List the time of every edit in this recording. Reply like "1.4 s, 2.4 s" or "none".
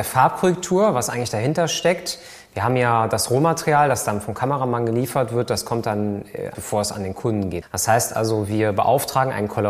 6.5 s, 7.6 s